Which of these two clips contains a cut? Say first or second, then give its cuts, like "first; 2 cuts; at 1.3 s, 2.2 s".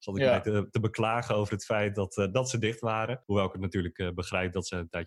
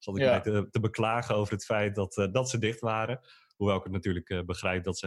first; 1 cut; at 3.2 s